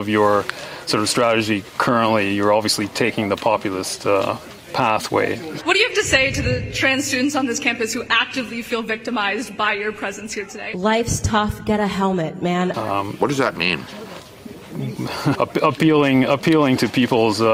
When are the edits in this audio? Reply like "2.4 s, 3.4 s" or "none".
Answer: 5.6 s, 12.7 s, 15.3 s